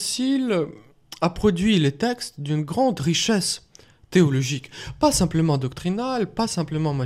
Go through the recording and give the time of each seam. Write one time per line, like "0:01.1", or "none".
none